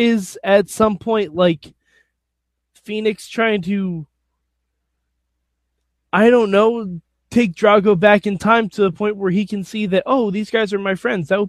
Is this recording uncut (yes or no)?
yes